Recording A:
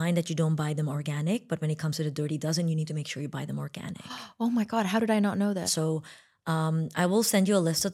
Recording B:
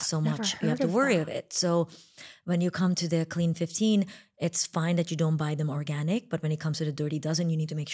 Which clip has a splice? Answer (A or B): A